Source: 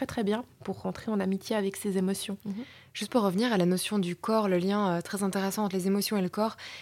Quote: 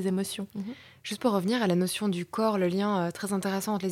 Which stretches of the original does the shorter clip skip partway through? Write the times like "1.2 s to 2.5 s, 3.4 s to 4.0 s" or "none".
none